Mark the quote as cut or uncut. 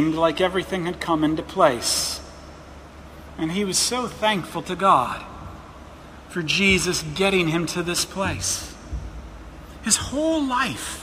uncut